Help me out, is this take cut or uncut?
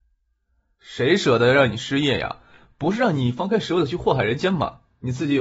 uncut